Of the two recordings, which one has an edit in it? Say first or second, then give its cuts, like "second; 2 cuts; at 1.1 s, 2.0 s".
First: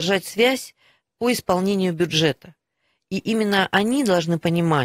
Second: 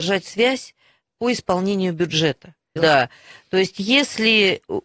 second; 1 cut; at 2.8 s